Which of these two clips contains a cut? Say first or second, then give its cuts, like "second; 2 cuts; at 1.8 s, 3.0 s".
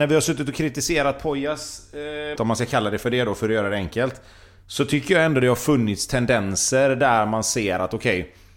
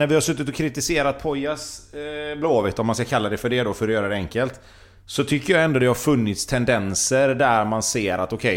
first; 1 cut; at 2.4 s